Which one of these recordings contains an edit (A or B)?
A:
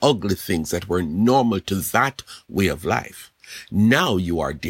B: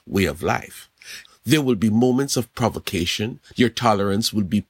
B